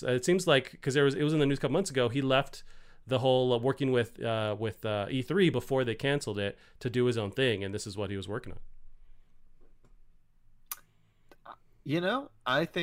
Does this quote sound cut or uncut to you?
uncut